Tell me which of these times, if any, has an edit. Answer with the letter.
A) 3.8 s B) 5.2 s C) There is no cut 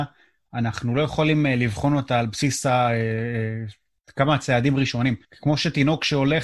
B